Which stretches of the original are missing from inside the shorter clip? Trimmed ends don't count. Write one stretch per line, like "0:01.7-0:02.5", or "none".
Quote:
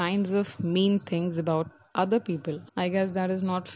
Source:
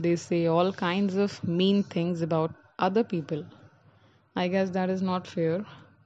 0:03.5-0:04.3